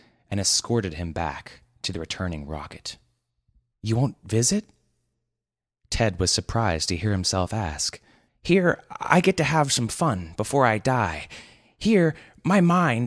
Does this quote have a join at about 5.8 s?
no; 2 cuts; at 3.7 s, 8.3 s

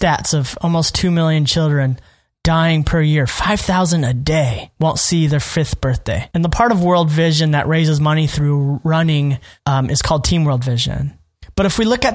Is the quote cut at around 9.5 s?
no; 1 cut; at 6.3 s

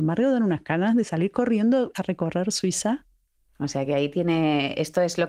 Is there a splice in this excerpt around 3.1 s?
no; 0 cuts

